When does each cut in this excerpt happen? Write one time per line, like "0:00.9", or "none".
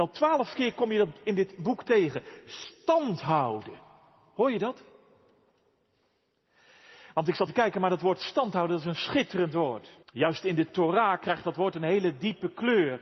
0:07.5
0:10.0